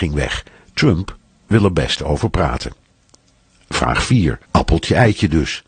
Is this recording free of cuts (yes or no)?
no